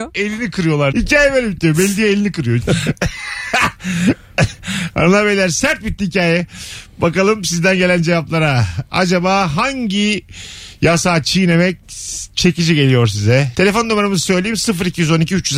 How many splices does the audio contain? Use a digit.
3